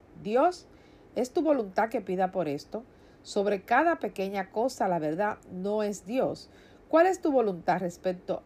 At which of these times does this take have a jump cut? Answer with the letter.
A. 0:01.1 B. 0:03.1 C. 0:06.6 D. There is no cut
D